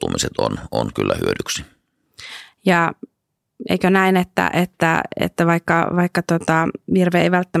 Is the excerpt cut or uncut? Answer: uncut